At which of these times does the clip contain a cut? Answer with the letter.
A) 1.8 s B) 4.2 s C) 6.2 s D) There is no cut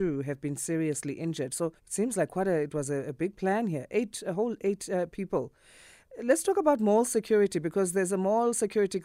A